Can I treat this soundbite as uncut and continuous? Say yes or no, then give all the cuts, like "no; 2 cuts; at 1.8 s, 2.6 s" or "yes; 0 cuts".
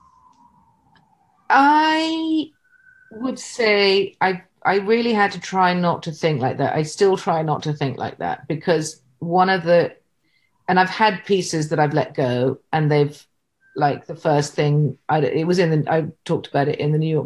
yes; 0 cuts